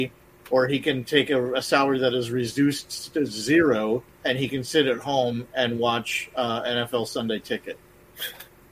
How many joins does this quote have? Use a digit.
1